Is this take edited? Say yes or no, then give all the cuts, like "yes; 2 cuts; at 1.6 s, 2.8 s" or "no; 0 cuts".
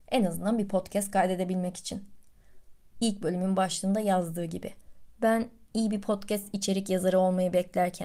yes; 2 cuts; at 2.9 s, 5.1 s